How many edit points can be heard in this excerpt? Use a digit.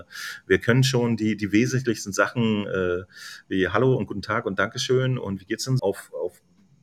1